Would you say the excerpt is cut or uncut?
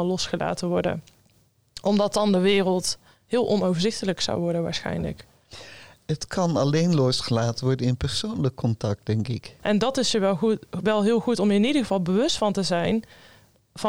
cut